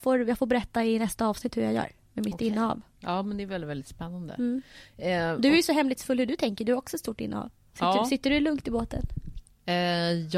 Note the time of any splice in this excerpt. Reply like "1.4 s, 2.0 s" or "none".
none